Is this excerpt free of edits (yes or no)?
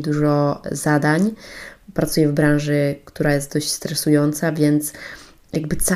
yes